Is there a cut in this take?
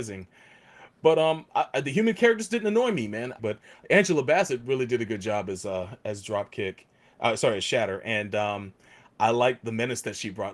yes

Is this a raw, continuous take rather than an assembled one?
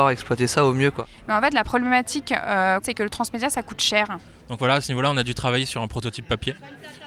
no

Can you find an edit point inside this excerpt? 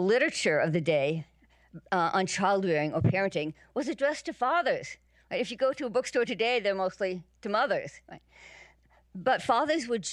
no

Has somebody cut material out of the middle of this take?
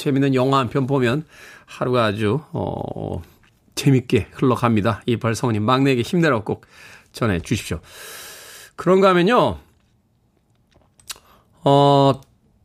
no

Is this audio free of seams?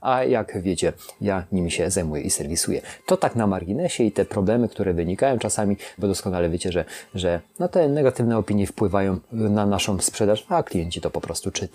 no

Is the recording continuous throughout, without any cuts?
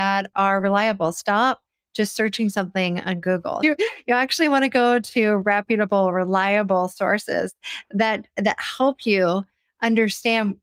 no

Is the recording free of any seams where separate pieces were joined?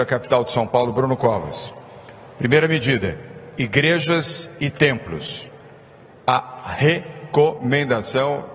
yes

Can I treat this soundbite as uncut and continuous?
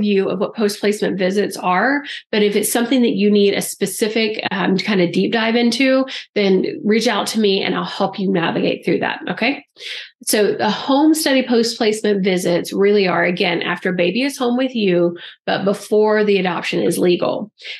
yes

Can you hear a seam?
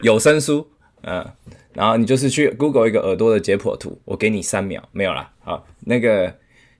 no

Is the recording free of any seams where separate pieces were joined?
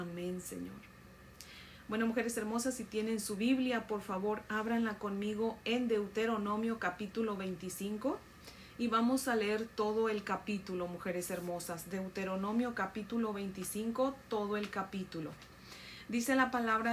yes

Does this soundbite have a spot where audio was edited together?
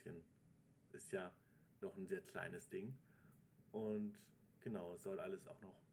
no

